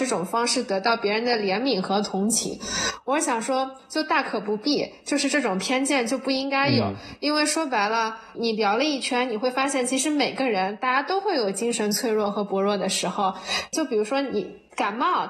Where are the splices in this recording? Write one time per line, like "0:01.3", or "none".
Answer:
0:08.3
0:13.7

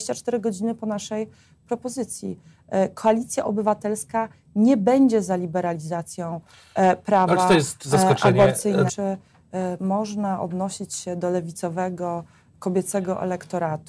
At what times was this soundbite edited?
0:08.9

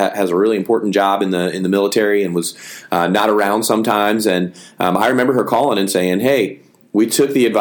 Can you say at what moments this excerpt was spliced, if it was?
none

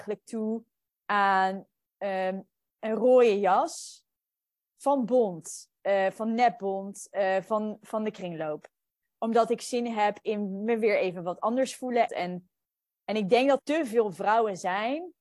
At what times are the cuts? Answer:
0:12.1
0:13.6

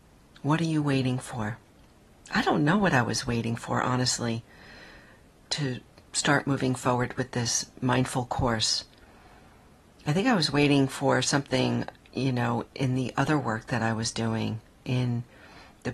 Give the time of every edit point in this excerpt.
0:05.5
0:12.7

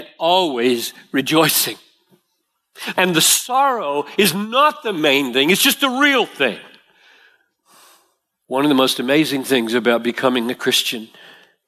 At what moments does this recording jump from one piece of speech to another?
0:02.9

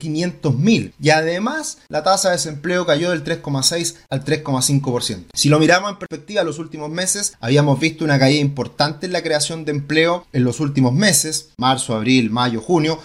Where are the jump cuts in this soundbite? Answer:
none

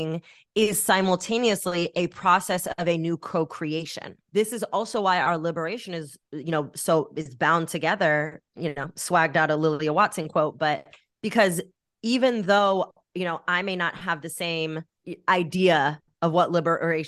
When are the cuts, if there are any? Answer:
0:04.2

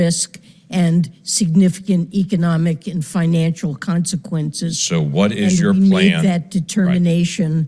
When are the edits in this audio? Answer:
none

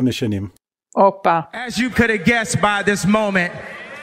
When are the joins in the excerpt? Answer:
0:01.9

